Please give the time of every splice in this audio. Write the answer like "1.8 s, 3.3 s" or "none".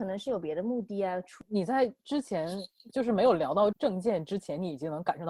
3.7 s